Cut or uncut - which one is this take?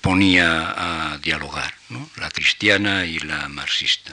uncut